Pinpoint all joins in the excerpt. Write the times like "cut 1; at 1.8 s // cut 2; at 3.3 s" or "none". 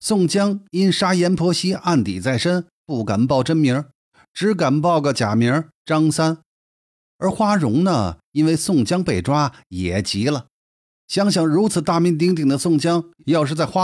none